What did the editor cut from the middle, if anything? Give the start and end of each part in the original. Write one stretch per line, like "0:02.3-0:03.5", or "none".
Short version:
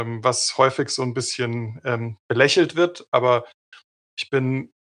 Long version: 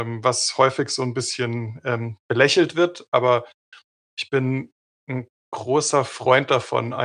none

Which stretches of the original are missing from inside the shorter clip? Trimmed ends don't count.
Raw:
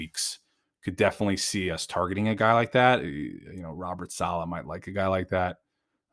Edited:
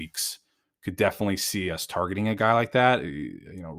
none

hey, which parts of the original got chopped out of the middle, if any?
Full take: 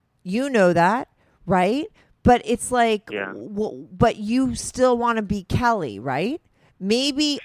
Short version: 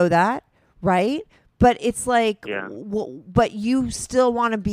none

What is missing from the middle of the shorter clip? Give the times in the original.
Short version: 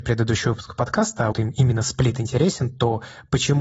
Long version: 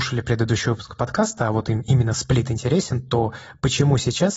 0:01.5-0:01.6

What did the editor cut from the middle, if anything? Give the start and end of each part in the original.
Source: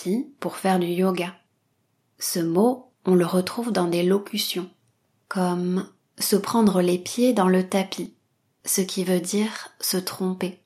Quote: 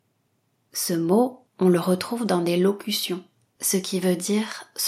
0:05.0-0:08.5

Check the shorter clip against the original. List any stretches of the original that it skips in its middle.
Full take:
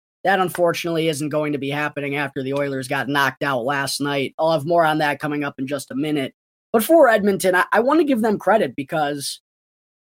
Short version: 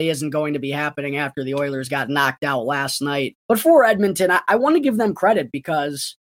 0:04.3-0:06.6

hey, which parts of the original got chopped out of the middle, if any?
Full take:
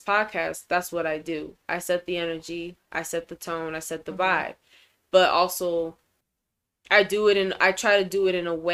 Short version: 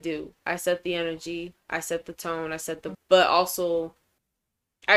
0:04.2-0:05.0

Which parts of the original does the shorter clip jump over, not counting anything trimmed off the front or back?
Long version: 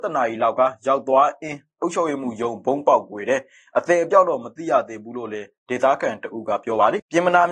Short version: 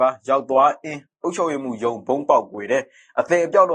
none

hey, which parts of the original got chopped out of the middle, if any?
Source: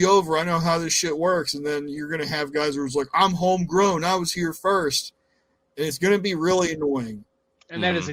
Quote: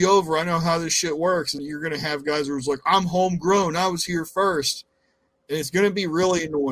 0:01.6-0:01.9

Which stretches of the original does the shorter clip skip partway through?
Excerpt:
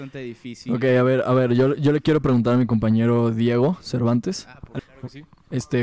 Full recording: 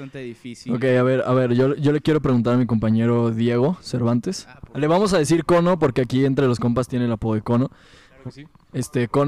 0:04.8-0:08.0

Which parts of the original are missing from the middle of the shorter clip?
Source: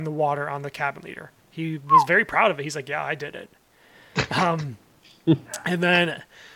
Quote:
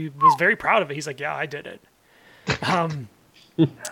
none

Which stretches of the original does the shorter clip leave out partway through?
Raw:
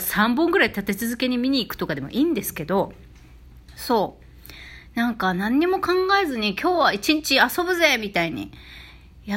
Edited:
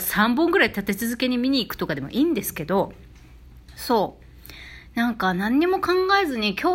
none

